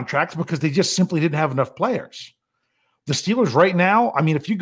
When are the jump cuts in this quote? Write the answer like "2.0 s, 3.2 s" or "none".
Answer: none